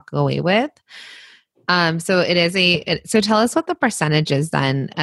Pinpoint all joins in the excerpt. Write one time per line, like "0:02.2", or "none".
none